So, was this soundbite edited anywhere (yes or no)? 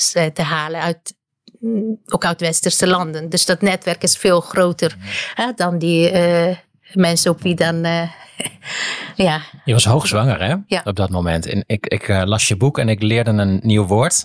no